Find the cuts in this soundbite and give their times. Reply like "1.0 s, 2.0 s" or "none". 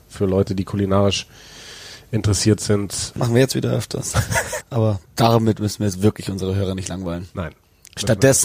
3.1 s, 4.6 s